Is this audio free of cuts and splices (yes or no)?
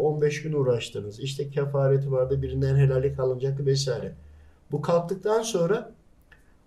yes